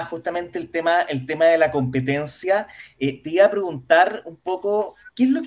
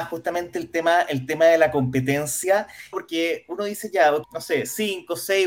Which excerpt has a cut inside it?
second; 2 cuts; at 2.9 s, 4.2 s

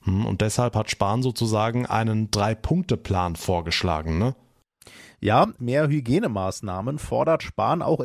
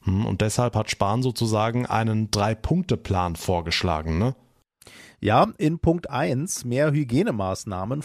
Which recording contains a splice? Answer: first; 1 cut; at 5.6 s

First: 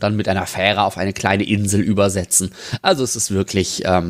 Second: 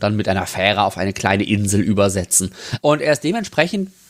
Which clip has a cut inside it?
second; 1 cut; at 2.8 s

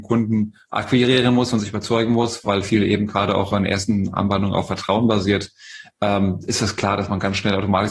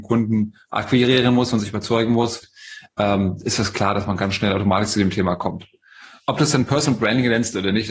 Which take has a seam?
second; 1 cut; at 2.4 s

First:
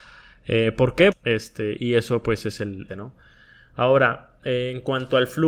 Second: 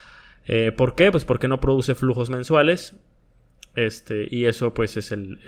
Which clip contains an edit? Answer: first; 2 cuts; at 1.1 s, 2.9 s

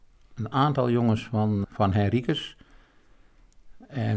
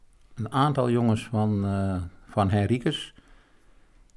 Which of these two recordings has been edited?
first; 1 cut; at 1.6 s

